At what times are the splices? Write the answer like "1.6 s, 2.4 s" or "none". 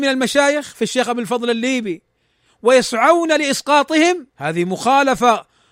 4.3 s